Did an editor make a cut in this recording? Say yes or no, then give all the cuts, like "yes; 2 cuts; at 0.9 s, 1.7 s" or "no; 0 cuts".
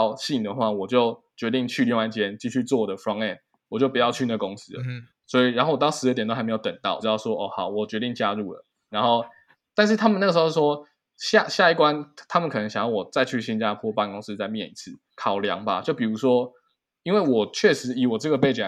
yes; 3 cuts; at 7.0 s, 8.9 s, 15.1 s